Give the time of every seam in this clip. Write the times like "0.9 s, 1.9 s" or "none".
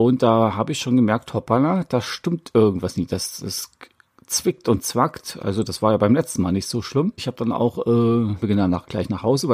7.2 s, 8.4 s